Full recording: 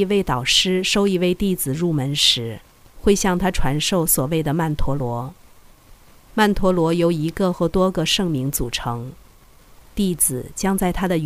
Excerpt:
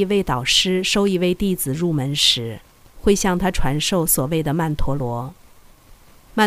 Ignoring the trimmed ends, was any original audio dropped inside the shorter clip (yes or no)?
no